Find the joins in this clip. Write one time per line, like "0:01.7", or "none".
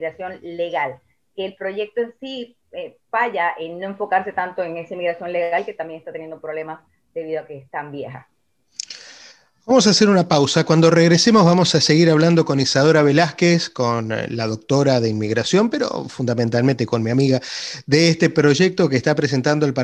0:02.6